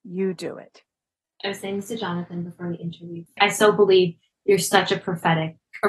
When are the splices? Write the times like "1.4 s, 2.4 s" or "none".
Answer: 1.2 s